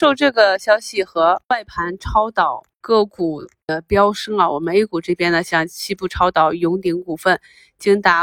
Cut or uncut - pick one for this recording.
uncut